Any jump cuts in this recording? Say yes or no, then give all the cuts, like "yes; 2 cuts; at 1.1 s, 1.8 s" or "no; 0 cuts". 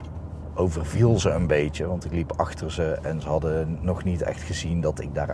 no; 0 cuts